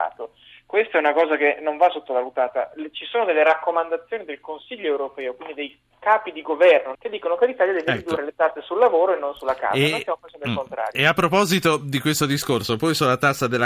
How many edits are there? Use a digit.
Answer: 1